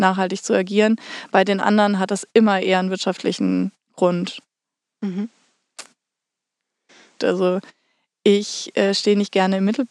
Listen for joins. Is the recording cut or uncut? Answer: cut